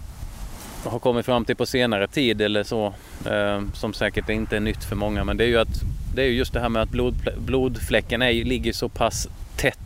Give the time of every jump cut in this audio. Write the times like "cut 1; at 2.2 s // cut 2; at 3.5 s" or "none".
none